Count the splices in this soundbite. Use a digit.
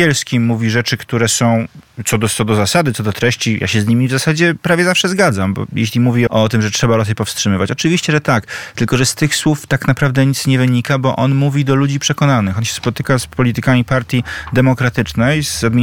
1